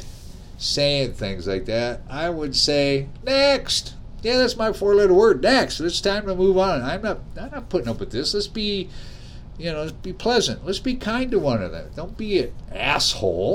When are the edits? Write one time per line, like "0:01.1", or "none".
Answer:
none